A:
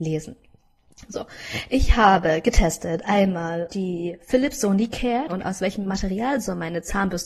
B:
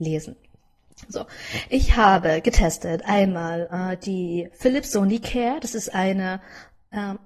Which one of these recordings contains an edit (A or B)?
A